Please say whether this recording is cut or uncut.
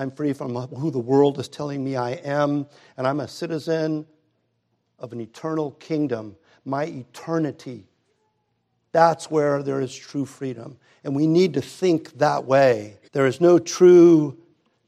cut